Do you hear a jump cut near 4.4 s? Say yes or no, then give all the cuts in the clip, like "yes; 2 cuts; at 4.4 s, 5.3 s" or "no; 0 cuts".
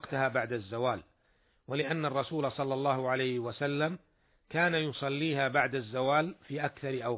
no; 0 cuts